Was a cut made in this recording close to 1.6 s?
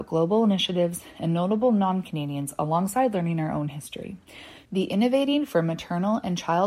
no; 1 cut; at 4.7 s

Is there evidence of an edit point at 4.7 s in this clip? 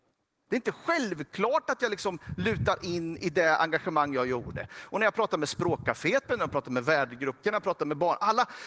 no; 2 cuts; at 6.2 s, 7.4 s

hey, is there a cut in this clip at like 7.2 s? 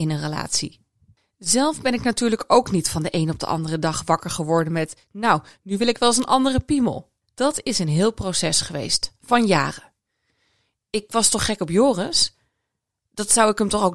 yes; 2 cuts; at 7.2 s, 10.7 s

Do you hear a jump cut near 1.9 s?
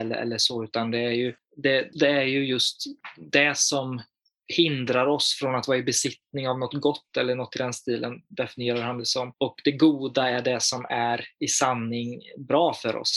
yes; 1 cut; at 1.9 s

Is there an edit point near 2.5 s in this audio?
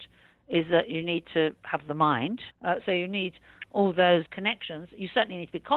yes; 2 cuts; at 2.5 s, 4.3 s

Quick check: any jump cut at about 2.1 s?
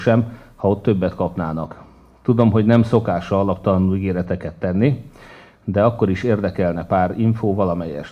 no; 0 cuts

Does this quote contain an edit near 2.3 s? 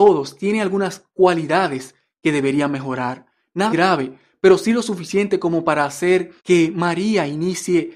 no; 2 cuts; at 3.7 s, 6.4 s

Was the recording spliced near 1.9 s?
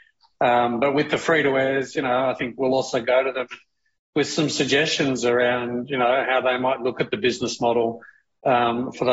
no; 0 cuts

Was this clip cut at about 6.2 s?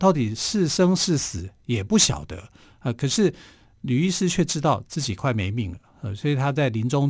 no; 0 cuts

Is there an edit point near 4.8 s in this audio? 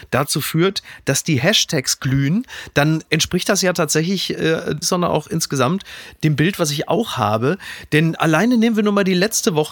yes; 1 cut; at 4.8 s

